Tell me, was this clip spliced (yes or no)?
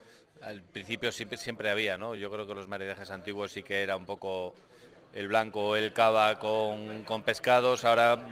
no